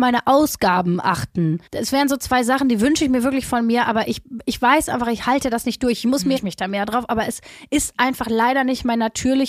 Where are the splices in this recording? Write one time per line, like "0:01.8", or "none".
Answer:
0:01.7
0:06.4